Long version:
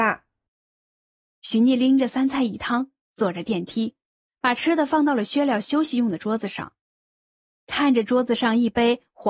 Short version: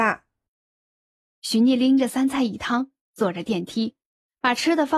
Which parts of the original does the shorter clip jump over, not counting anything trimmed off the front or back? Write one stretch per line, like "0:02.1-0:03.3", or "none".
none